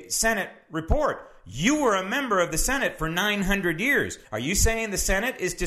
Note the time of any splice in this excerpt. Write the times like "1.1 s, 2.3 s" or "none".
4.2 s